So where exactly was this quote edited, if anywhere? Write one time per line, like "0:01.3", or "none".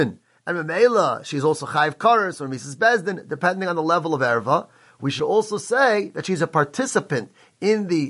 none